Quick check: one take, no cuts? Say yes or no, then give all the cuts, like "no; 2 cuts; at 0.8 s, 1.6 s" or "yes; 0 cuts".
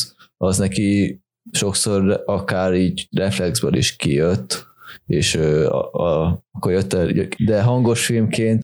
no; 1 cut; at 7.4 s